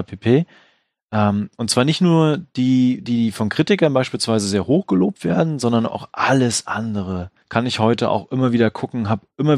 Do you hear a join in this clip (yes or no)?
yes